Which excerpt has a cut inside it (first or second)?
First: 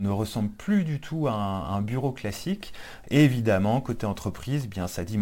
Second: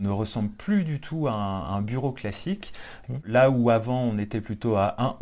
second